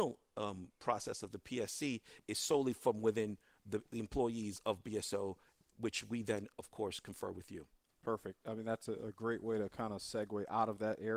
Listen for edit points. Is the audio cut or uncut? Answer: uncut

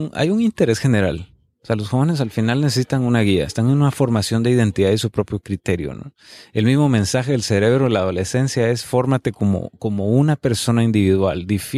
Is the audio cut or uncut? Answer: uncut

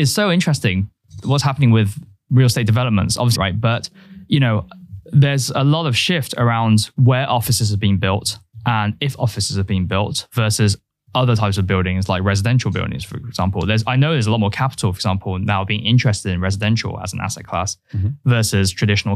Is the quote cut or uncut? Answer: cut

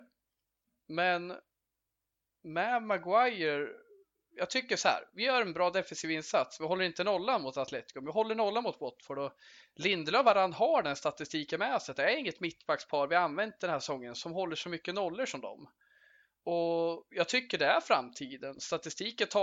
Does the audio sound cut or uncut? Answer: uncut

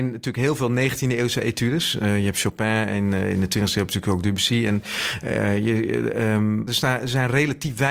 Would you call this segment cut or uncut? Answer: cut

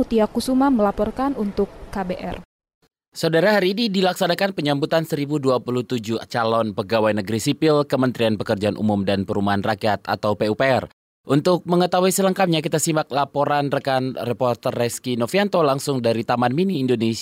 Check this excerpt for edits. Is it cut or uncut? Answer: uncut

